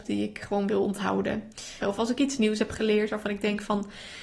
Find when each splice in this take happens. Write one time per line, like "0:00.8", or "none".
0:01.8